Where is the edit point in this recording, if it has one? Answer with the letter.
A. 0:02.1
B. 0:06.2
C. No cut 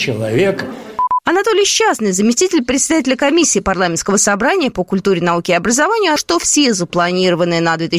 B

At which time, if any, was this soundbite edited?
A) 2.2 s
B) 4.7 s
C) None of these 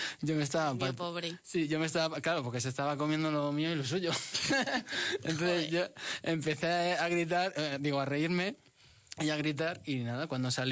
C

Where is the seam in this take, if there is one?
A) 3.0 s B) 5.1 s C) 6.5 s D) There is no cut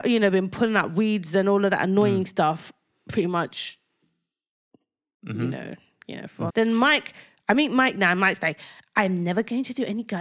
C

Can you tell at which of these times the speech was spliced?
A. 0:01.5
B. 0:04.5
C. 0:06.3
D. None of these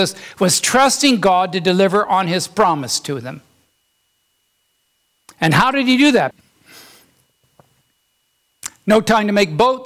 C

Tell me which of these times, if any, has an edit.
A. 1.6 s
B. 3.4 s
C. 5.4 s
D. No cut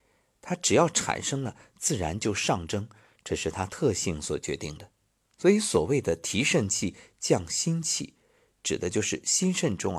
D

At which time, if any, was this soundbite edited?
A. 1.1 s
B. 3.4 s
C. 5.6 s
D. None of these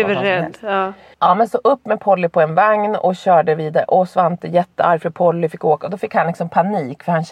A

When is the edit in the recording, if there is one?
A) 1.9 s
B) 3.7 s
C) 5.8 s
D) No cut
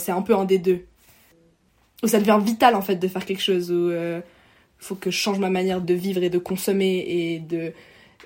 C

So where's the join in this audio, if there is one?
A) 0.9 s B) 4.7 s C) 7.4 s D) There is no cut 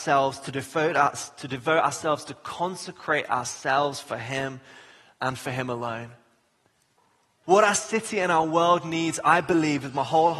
C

